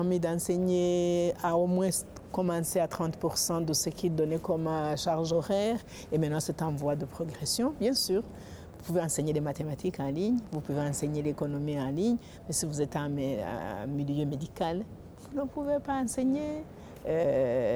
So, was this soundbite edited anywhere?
no; 0 cuts

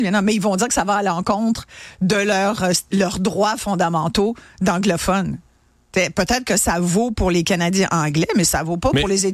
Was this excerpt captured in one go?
yes; 0 cuts

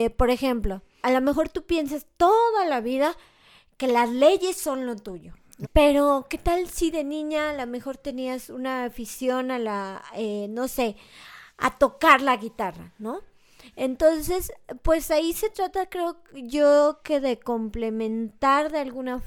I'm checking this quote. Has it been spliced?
yes; 2 cuts; at 1.0 s, 5.6 s

